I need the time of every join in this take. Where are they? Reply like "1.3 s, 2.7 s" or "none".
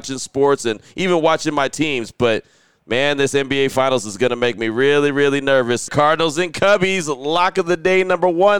5.9 s

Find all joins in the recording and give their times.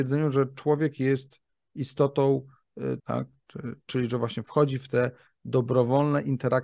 3.0 s

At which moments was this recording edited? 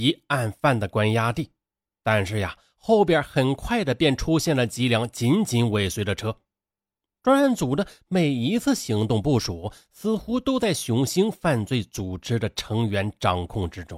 11.1 s

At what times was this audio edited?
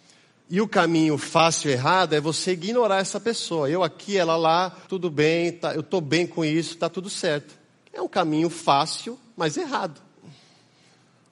4.9 s

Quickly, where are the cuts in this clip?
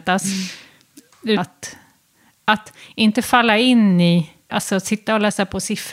1.4 s, 4.5 s

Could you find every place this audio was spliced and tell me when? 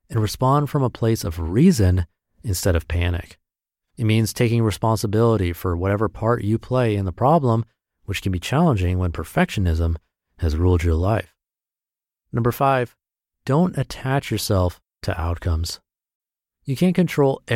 none

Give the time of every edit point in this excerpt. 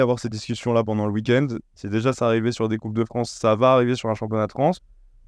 1.6 s

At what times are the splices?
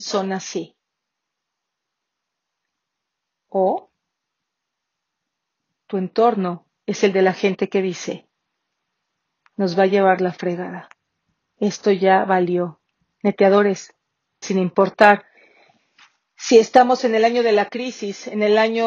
14.4 s

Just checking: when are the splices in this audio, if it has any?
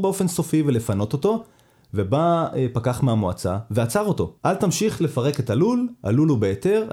4.4 s

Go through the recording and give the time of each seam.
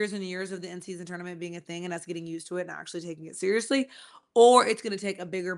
none

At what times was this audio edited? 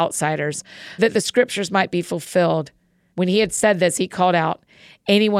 1.0 s, 3.1 s

